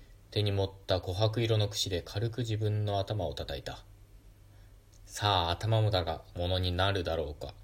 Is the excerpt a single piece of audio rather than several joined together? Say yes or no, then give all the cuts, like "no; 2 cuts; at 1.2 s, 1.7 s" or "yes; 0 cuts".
no; 1 cut; at 6.3 s